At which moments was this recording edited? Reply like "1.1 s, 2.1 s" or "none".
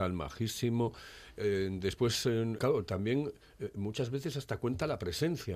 2.6 s